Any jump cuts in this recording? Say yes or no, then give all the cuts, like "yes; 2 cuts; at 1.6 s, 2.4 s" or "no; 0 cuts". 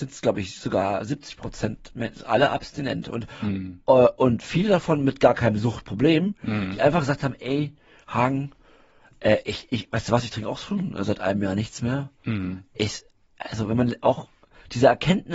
no; 0 cuts